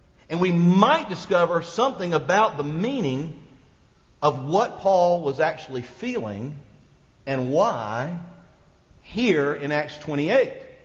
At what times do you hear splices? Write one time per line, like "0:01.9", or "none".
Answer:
none